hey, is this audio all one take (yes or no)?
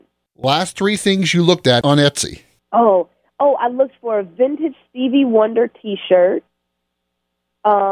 yes